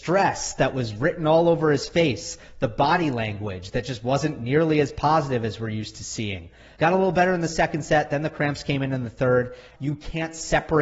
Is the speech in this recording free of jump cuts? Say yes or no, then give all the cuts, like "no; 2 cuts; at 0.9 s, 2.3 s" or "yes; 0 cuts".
no; 2 cuts; at 6.7 s, 9.8 s